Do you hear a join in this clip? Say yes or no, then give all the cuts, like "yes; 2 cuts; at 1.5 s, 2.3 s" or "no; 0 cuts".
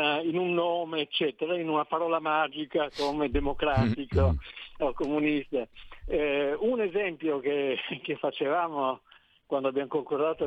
no; 0 cuts